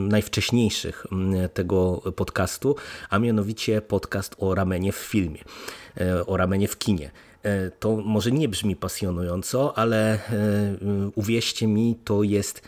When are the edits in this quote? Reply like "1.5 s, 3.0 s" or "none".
none

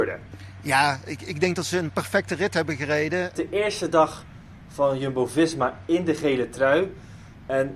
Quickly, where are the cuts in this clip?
3.3 s

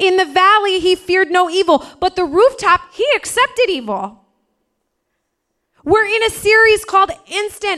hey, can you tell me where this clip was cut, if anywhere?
none

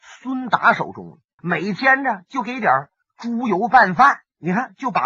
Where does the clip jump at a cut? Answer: 1.4 s

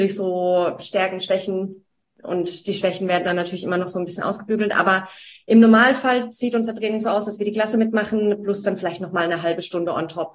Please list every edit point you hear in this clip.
none

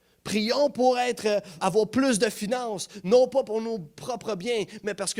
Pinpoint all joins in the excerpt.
1.6 s

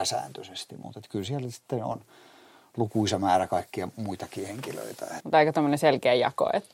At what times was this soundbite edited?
5.2 s

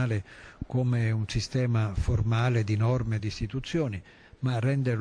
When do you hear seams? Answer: 3.2 s

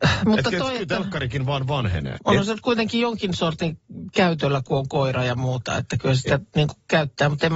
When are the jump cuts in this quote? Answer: 2.2 s

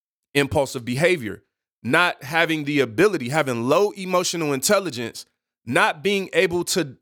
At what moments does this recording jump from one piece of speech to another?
none

